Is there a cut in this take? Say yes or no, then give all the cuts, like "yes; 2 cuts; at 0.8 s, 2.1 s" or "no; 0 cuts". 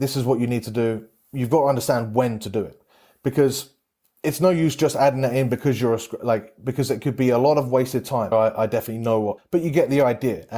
yes; 2 cuts; at 8.3 s, 9.4 s